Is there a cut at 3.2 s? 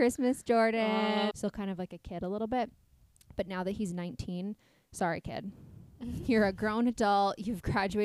no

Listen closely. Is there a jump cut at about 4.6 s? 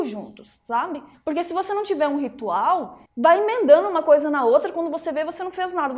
no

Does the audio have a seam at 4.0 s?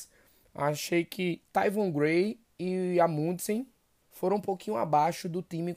yes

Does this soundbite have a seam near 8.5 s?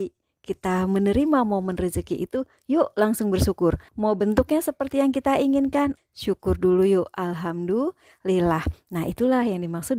no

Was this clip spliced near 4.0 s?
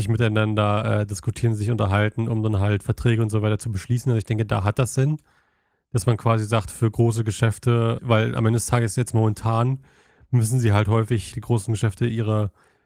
no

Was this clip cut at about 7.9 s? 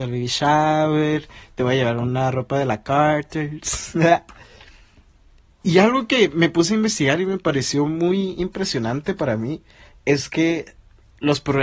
no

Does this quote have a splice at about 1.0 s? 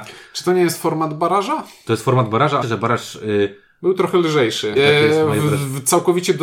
no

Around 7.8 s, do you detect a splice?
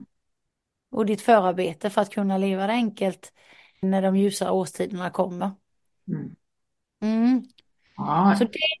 no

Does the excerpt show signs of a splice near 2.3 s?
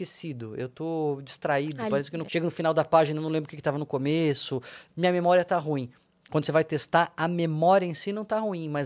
yes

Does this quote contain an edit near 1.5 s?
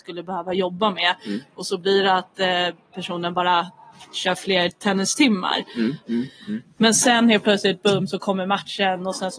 no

